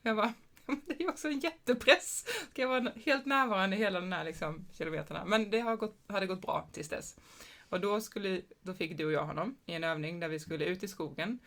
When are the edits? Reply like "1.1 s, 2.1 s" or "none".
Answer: none